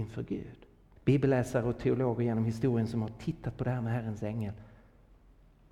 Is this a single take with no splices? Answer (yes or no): no